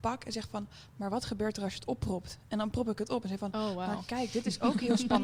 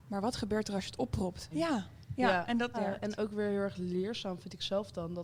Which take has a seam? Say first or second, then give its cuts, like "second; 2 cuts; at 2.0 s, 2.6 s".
second; 2 cuts; at 1.5 s, 2.7 s